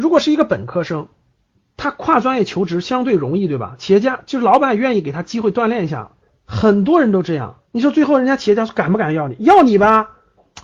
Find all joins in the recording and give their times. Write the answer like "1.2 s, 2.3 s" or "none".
6.3 s, 7.6 s

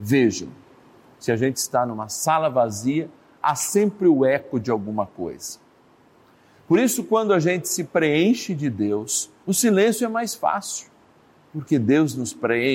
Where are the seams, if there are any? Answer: 9.4 s

